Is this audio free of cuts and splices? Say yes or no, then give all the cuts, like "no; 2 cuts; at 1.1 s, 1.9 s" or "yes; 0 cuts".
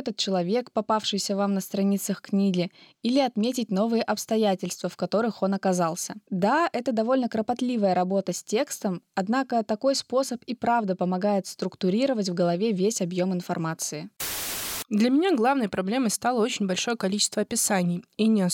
yes; 0 cuts